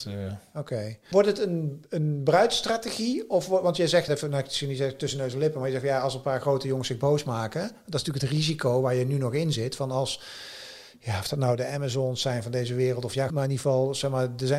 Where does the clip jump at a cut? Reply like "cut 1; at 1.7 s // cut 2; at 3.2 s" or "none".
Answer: cut 1; at 4.1 s // cut 2; at 13.3 s